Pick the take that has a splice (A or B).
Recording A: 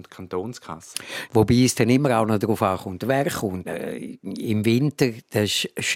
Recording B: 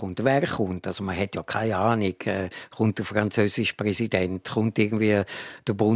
A